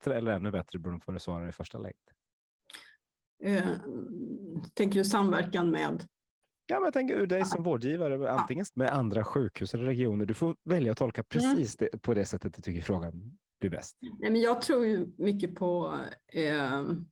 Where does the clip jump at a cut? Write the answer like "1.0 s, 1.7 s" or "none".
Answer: 7.3 s, 8.7 s